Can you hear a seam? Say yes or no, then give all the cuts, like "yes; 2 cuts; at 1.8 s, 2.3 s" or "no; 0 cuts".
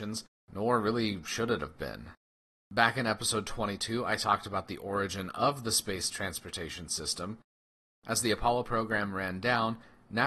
yes; 1 cut; at 2.5 s